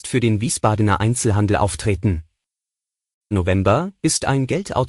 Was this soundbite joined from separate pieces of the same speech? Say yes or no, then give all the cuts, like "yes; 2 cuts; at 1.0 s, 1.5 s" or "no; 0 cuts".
yes; 1 cut; at 3.3 s